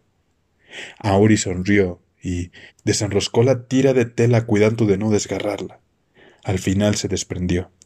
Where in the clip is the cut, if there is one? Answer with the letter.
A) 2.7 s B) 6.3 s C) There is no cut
A